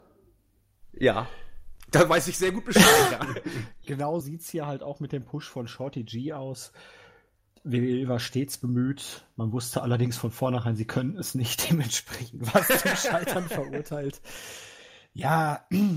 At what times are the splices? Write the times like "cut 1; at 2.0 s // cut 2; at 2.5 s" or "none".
cut 1; at 4.2 s